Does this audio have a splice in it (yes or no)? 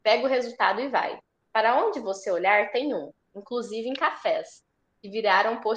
yes